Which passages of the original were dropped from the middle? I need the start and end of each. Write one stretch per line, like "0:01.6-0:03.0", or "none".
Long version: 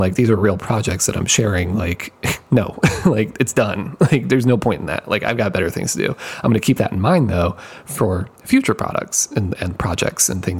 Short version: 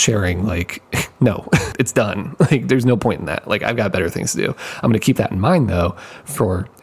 0:03.0-0:03.3